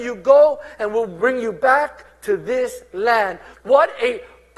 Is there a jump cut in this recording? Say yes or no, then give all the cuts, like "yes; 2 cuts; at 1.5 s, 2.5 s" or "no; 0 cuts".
yes; 1 cut; at 3.5 s